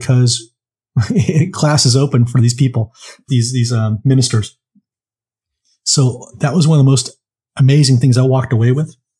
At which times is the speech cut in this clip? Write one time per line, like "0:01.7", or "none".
0:03.3